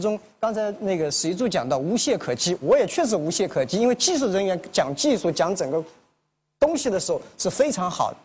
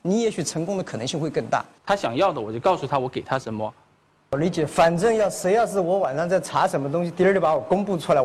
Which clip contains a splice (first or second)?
second